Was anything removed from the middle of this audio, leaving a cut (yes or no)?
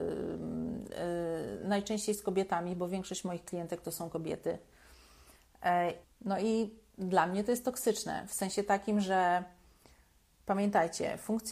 yes